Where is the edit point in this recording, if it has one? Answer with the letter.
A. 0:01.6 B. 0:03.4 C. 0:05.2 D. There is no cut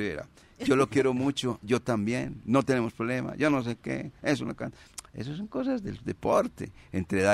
A